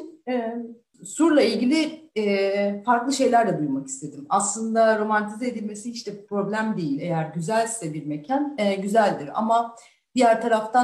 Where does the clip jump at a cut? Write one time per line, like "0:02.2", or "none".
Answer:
0:00.9